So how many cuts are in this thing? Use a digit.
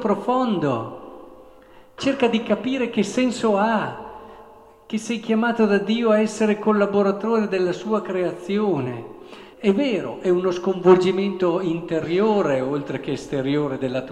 2